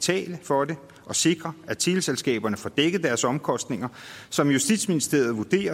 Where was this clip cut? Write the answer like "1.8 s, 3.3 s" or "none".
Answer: none

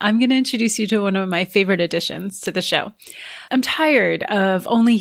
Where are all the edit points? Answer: 3.5 s

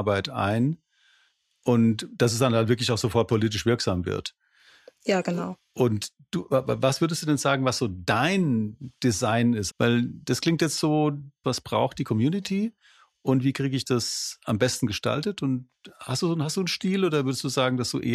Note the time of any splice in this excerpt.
9.7 s, 11.4 s

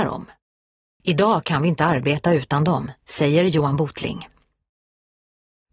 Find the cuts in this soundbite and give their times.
1.0 s, 3.0 s

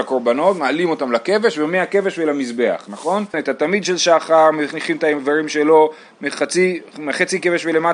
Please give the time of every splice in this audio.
3.3 s

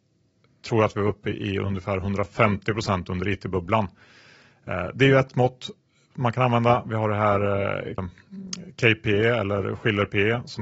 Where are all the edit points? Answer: 6.8 s, 8.0 s

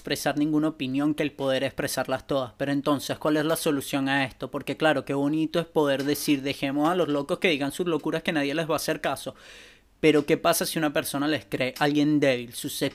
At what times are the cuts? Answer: none

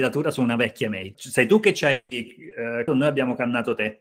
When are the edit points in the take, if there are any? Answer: 1.1 s, 2.9 s

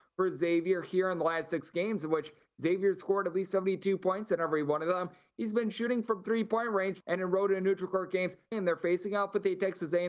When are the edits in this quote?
7.0 s, 8.5 s

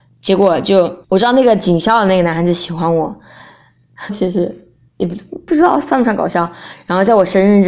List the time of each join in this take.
1.0 s, 4.1 s

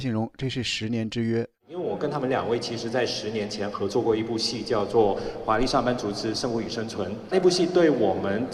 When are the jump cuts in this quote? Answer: none

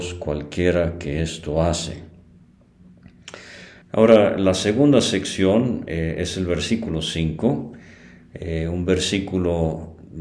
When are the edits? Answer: 3.8 s

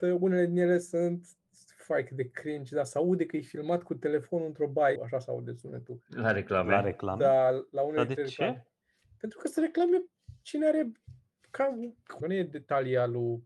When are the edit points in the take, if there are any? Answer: 5.0 s, 12.2 s

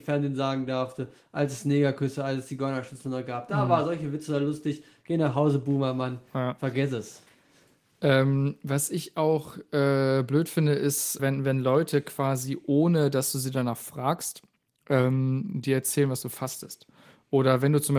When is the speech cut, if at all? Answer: 11.2 s

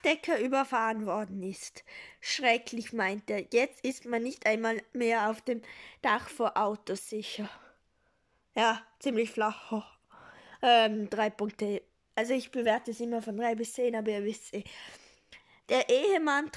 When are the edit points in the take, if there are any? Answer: none

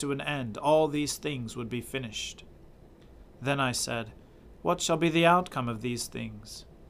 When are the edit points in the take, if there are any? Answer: 3.3 s, 4.5 s

